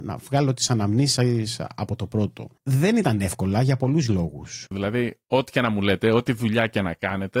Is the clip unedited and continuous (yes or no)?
no